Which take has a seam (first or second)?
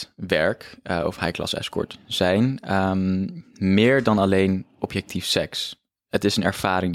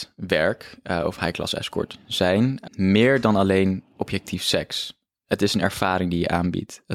second